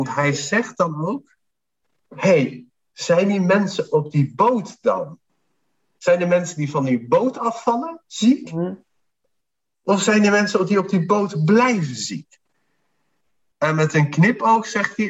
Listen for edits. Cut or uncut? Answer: uncut